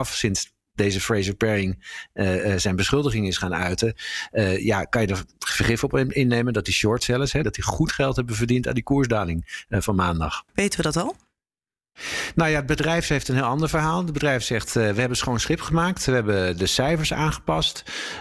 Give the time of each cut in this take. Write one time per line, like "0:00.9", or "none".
0:07.4
0:10.5